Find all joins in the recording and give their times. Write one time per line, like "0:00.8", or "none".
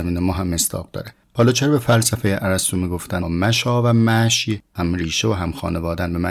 0:03.2